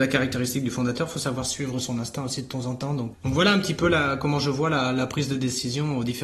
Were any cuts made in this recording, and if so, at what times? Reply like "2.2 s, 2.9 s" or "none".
3.1 s